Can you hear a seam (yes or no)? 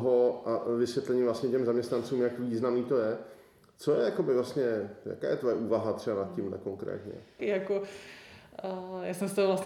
yes